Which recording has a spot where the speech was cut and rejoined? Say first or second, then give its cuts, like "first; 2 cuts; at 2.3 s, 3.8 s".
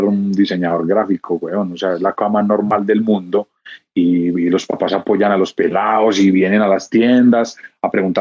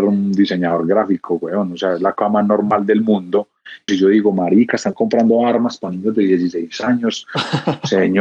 second; 1 cut; at 3.9 s